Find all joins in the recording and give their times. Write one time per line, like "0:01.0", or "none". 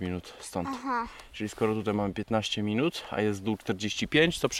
none